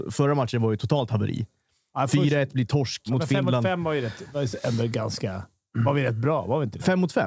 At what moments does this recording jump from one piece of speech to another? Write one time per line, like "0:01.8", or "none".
0:03.1